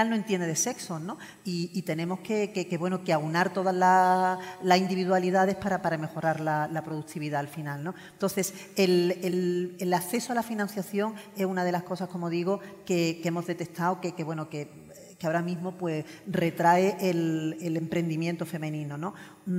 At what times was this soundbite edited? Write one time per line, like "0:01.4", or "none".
none